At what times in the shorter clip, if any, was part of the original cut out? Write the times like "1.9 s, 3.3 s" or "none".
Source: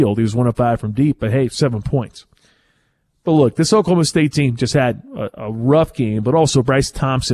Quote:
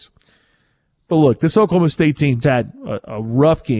2.4 s